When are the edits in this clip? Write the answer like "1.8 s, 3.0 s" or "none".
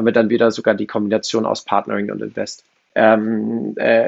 2.9 s